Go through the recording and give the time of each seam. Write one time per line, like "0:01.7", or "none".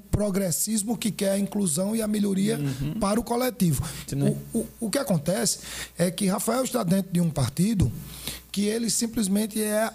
0:04.1